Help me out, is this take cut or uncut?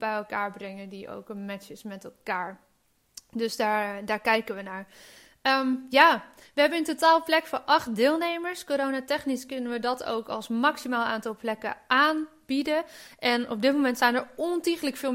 uncut